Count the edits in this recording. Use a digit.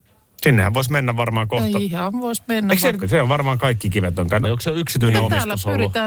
2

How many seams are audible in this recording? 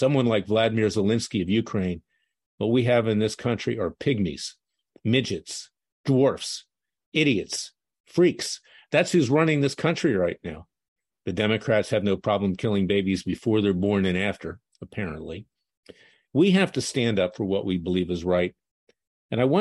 2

